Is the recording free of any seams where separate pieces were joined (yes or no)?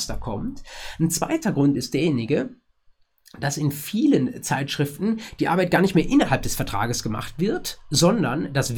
yes